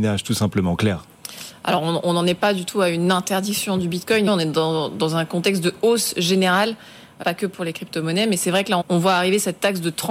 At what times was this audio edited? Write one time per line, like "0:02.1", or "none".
0:04.3
0:07.2
0:08.8